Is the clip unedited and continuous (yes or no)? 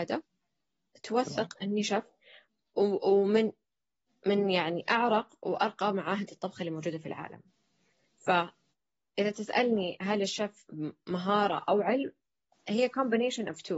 yes